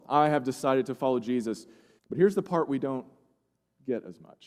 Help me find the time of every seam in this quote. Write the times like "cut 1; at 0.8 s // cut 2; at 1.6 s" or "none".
cut 1; at 2.0 s